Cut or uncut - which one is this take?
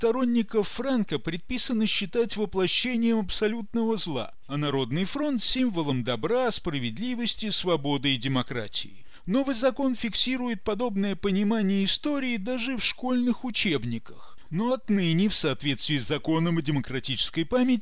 cut